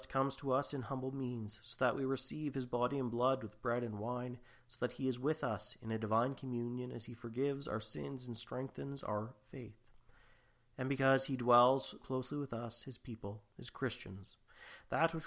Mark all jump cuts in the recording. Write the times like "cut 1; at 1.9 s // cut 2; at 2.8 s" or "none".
cut 1; at 12.0 s